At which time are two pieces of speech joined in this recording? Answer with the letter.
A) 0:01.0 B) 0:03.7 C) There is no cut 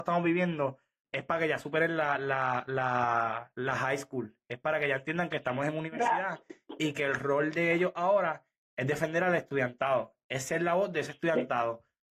A